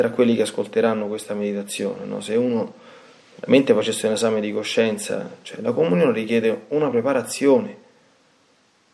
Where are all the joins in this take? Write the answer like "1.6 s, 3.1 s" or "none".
none